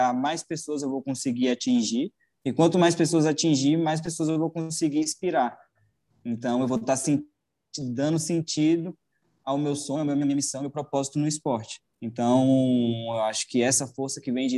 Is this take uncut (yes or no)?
yes